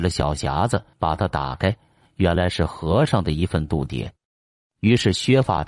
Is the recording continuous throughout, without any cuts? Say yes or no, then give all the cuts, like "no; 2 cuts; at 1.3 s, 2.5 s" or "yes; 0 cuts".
no; 1 cut; at 0.9 s